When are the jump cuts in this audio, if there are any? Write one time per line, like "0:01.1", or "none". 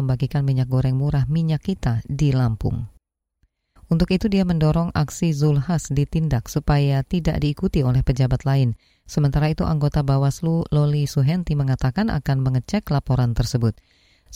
0:03.8